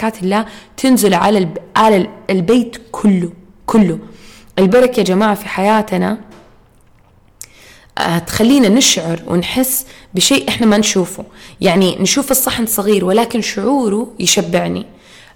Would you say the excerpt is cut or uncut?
uncut